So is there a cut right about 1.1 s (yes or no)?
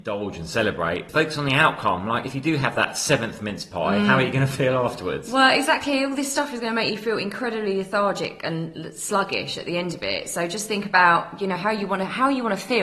yes